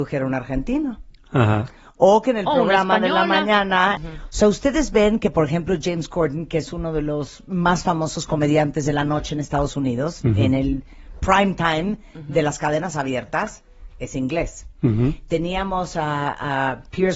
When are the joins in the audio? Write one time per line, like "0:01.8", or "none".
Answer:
0:04.0